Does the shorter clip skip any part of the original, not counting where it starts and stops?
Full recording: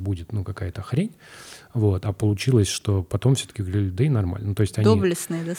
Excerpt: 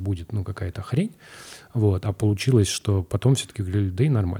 no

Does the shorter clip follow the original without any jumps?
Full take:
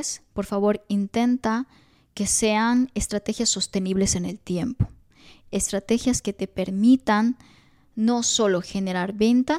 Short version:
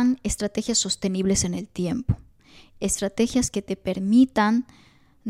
yes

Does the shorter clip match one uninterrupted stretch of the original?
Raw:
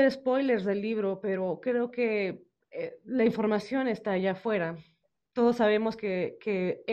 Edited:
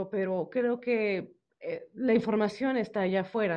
yes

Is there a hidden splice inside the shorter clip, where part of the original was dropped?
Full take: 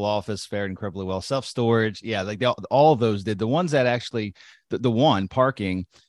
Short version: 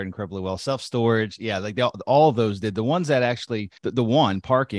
yes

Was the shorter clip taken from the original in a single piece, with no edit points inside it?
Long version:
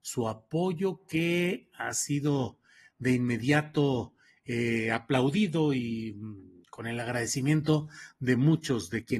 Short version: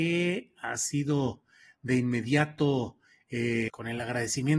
no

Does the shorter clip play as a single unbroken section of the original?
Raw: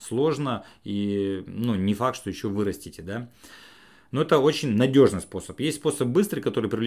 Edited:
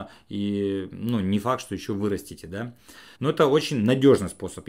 no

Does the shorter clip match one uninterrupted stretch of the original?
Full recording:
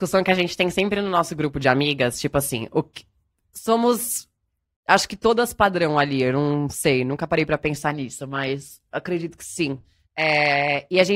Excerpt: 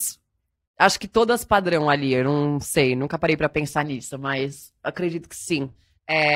yes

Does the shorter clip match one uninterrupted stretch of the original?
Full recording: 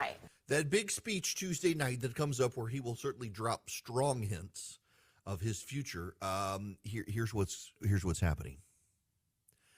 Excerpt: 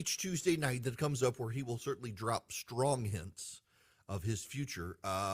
yes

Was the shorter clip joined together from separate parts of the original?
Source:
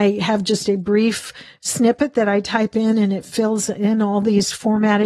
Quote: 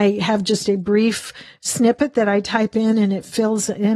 no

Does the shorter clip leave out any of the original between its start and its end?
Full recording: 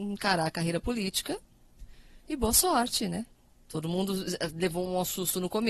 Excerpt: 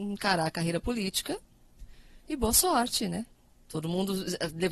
no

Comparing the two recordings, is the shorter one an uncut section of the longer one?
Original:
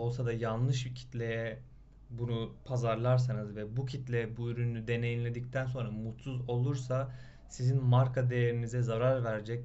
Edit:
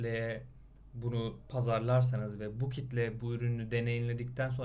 yes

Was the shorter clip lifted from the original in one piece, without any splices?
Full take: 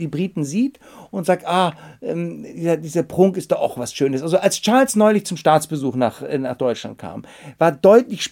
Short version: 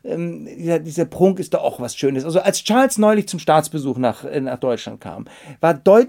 yes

